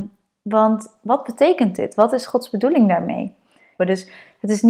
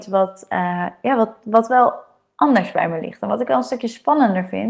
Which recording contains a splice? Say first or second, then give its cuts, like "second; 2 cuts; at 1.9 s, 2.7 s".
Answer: first; 1 cut; at 3.8 s